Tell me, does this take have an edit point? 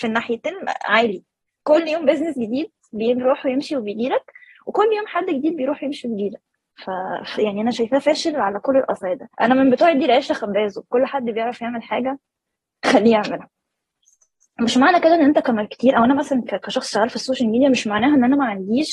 yes; 2 cuts; at 7.4 s, 9.3 s

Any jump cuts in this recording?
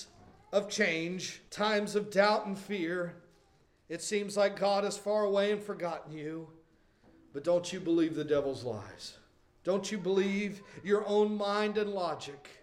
yes; 1 cut; at 1.5 s

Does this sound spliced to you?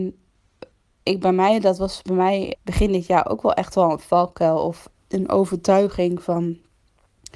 yes; 2 cuts; at 2.5 s, 5.0 s

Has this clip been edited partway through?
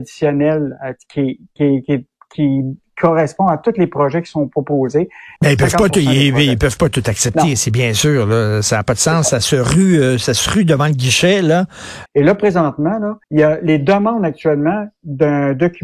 yes; 3 cuts; at 5.4 s, 12.1 s, 13.2 s

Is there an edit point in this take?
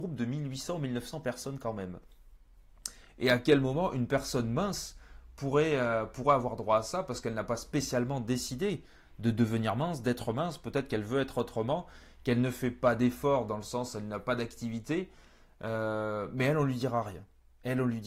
no; 0 cuts

